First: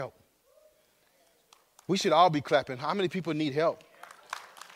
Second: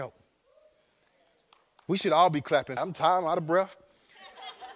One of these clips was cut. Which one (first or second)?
second